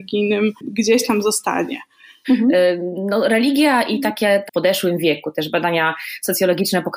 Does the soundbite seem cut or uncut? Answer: cut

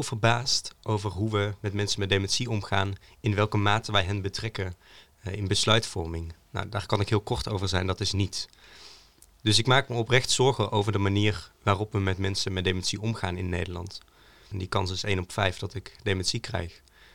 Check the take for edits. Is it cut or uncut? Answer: cut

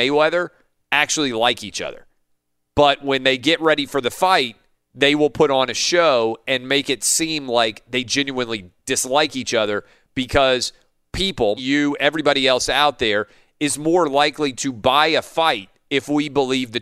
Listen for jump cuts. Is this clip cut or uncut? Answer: cut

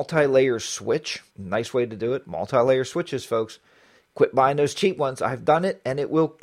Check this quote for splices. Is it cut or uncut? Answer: cut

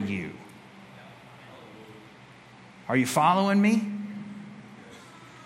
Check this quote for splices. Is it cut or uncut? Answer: uncut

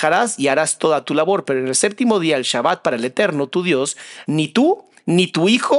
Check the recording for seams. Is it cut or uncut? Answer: cut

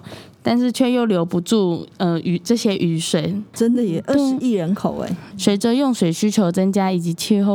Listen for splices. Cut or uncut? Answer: cut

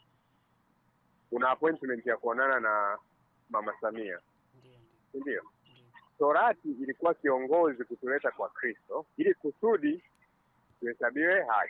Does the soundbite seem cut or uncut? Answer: cut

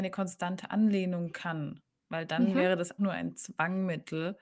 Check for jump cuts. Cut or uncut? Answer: cut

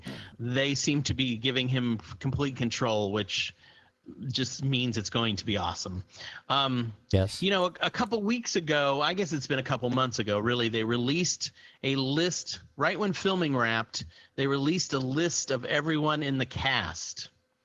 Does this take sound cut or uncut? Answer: uncut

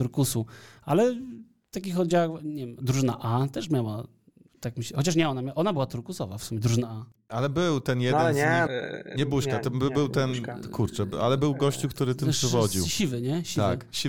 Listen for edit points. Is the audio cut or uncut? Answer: cut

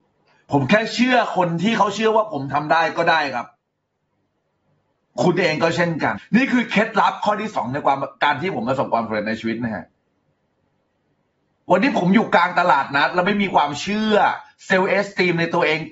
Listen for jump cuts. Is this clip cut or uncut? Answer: cut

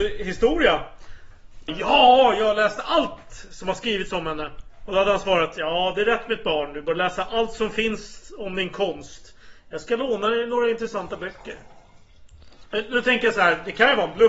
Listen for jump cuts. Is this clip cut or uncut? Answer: cut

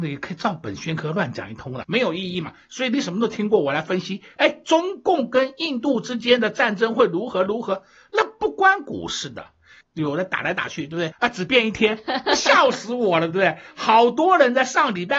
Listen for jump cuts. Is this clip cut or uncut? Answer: cut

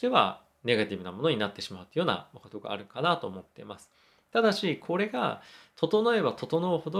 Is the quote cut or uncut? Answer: uncut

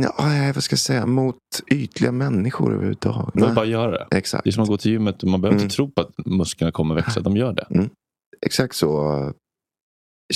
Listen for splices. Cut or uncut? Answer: cut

